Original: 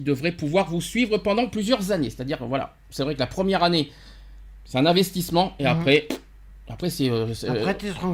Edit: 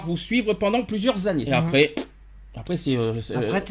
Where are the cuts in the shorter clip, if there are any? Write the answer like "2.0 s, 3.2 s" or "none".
1.5 s